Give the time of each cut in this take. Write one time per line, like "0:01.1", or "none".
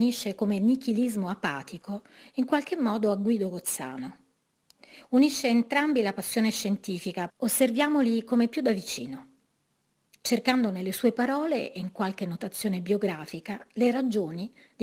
0:07.3

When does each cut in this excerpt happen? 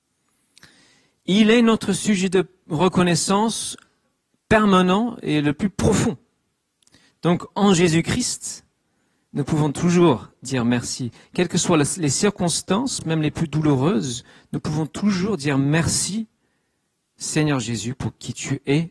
none

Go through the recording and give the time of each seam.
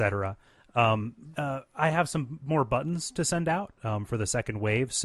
none

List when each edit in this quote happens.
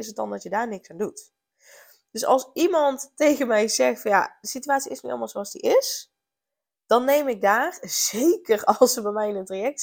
none

